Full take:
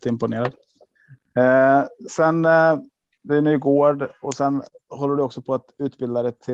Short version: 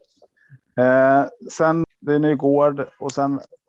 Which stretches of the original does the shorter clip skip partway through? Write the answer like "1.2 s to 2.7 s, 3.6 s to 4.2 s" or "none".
2.4 s to 3.1 s